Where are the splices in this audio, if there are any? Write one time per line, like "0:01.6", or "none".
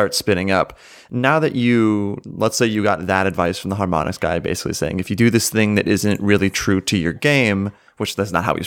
none